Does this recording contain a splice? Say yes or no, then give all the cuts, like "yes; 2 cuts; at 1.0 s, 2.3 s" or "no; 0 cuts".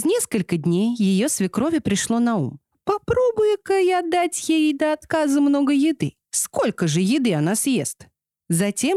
yes; 1 cut; at 2.7 s